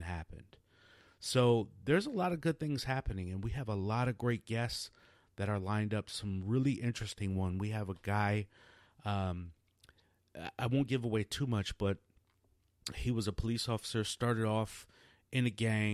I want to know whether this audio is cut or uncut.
uncut